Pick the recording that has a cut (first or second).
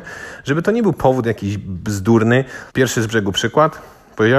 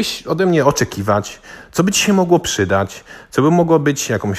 first